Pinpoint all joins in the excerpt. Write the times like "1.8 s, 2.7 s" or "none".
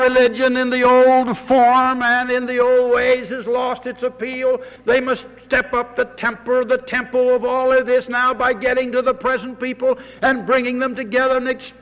4.8 s